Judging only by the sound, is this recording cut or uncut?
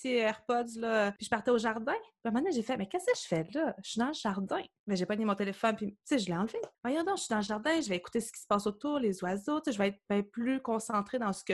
uncut